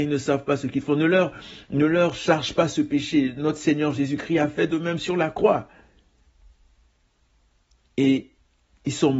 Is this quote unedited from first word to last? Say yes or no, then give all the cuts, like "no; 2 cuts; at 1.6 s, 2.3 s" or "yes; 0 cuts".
yes; 0 cuts